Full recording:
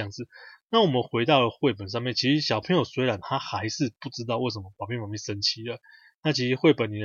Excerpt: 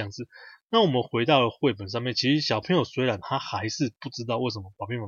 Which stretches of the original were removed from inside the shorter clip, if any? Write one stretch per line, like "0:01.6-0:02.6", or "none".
none